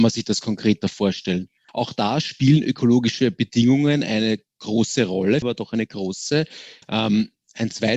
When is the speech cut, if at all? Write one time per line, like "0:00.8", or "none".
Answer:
0:01.7
0:05.4
0:06.8